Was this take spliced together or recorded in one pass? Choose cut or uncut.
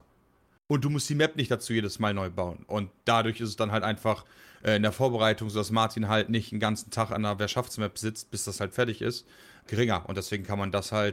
cut